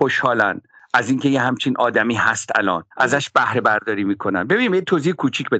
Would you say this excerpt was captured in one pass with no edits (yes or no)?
no